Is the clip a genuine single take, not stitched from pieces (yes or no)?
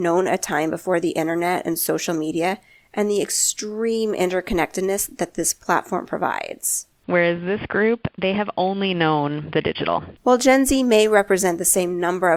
no